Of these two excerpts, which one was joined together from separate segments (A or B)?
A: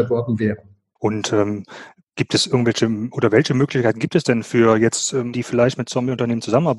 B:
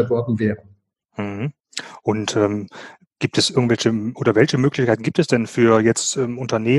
A